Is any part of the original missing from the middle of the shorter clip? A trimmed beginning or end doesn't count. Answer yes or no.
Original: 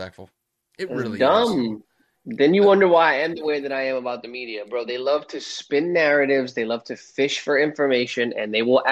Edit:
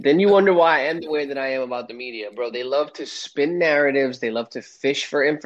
no